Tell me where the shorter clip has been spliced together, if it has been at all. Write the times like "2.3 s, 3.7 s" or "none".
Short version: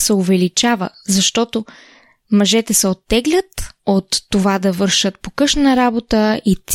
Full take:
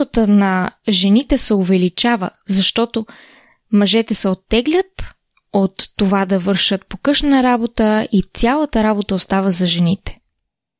3.8 s